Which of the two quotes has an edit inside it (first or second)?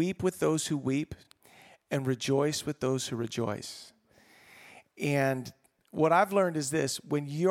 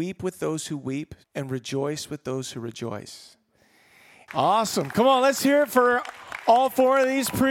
second